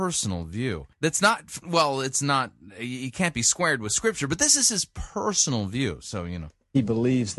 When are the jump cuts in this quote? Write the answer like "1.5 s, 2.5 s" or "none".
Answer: 0.9 s

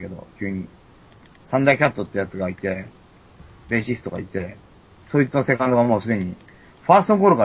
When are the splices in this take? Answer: none

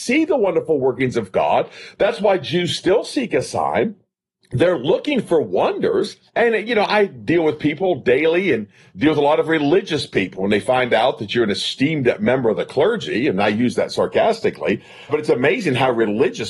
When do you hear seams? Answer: 6.3 s, 15.1 s

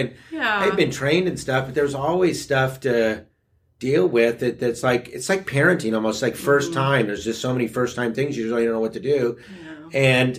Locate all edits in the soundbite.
none

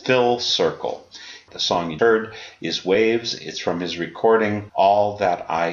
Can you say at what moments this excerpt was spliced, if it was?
2.0 s

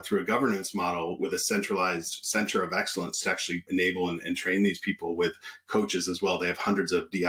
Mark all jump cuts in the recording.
none

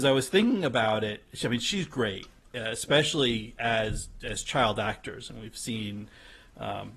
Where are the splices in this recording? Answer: none

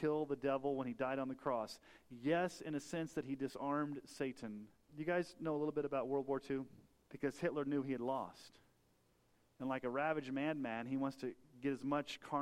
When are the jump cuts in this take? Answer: 4.9 s, 7.1 s

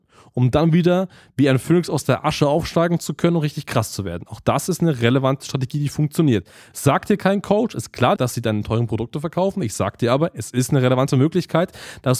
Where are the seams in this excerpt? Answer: 8.2 s

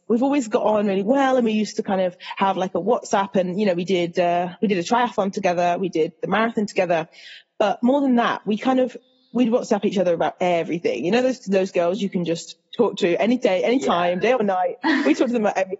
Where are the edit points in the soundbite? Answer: none

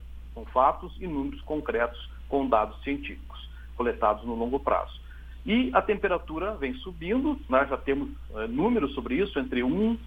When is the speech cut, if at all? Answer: none

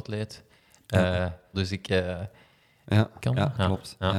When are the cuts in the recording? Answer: 1.5 s, 3.2 s

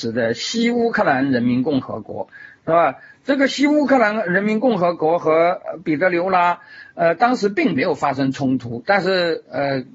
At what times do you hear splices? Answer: none

